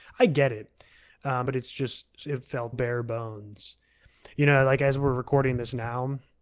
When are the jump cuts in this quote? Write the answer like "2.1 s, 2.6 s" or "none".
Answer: 1.5 s, 2.7 s